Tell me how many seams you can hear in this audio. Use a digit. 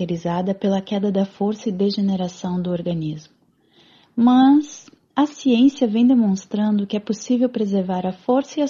0